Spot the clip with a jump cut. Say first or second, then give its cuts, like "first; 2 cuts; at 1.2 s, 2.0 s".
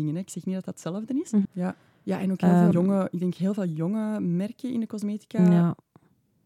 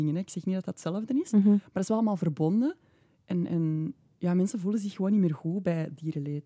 first; 2 cuts; at 1.4 s, 2.7 s